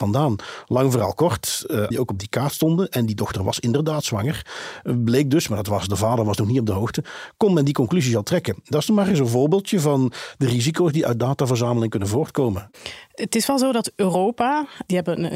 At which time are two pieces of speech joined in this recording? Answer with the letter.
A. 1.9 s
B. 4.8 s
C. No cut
A